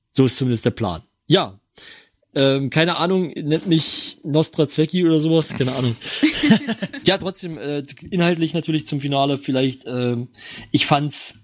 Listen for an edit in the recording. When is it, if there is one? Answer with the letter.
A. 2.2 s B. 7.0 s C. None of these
B